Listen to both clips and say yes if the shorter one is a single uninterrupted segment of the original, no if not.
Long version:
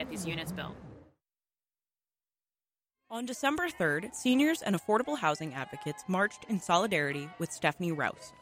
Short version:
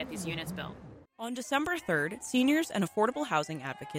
no